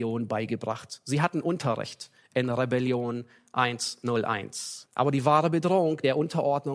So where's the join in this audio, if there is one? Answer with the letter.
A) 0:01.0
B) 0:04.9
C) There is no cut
B